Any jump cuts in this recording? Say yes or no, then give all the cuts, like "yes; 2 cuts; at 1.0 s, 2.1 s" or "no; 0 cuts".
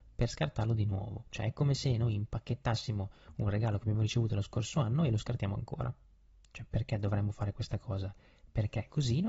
no; 0 cuts